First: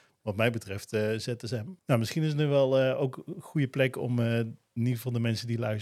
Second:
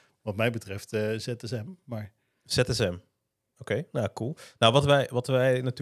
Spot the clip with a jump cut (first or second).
first